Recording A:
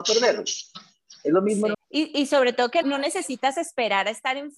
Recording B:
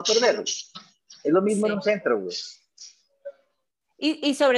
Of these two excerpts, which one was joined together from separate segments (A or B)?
A